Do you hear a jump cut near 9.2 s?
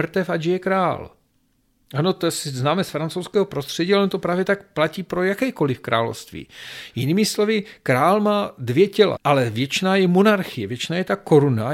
yes; 1 cut; at 9.2 s

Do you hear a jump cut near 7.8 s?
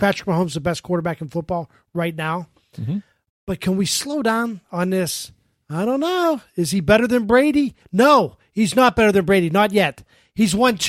no; 0 cuts

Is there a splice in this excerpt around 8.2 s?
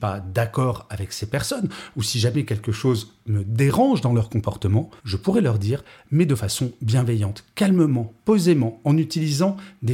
no; 1 cut; at 5.0 s

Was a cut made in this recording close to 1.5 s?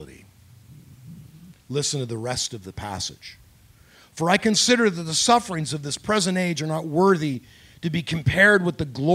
yes; 1 cut; at 1.5 s

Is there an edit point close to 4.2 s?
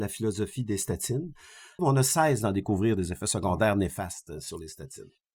no; 1 cut; at 1.8 s

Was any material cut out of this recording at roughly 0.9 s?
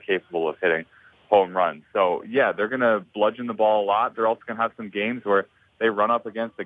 no; 0 cuts

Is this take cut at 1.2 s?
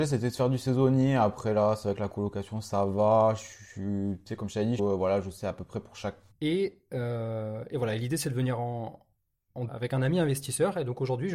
no; 3 cuts; at 4.8 s, 6.3 s, 9.7 s

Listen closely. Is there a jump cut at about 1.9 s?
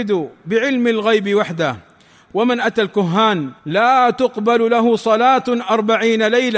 no; 1 cut; at 3.6 s

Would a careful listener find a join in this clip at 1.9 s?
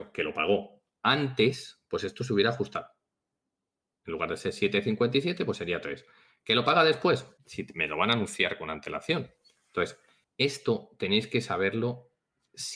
no; 2 cuts; at 7.4 s, 10.2 s

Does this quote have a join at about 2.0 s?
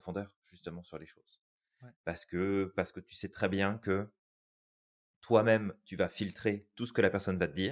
no; 0 cuts

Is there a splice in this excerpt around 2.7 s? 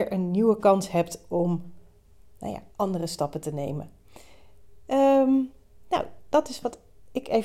yes; 1 cut; at 2.7 s

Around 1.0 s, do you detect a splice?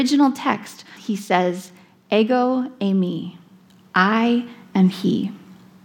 yes; 1 cut; at 1.0 s

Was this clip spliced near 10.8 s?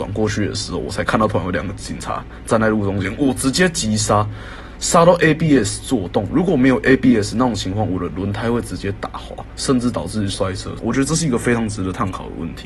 yes; 1 cut; at 10.8 s

